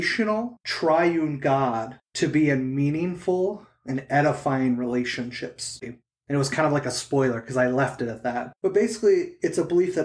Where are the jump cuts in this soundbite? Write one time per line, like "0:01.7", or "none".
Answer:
0:05.8
0:08.5